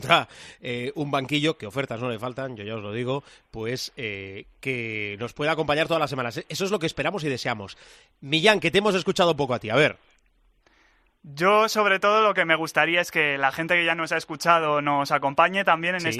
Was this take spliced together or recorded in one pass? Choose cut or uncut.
uncut